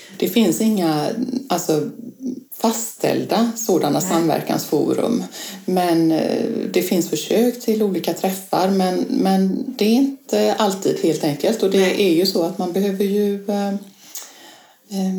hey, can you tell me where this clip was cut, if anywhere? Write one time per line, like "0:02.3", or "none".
0:02.5